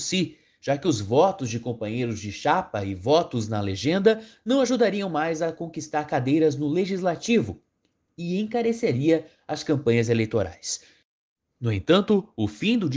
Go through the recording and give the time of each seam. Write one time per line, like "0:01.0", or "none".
none